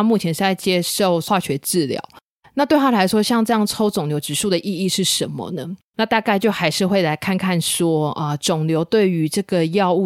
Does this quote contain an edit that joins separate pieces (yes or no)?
no